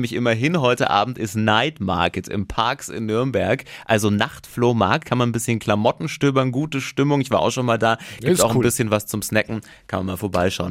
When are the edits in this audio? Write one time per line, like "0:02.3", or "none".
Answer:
none